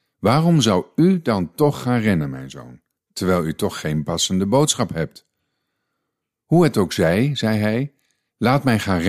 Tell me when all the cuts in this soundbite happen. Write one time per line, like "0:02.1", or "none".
none